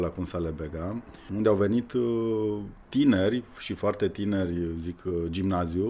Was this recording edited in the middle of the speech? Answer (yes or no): yes